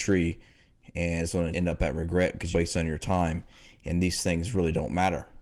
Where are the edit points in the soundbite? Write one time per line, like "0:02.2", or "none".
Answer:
0:01.5
0:02.5